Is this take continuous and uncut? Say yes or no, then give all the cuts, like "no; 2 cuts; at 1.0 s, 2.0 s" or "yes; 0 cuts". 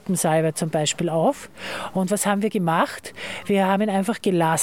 yes; 0 cuts